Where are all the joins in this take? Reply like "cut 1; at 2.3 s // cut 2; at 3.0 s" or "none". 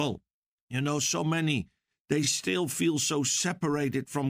none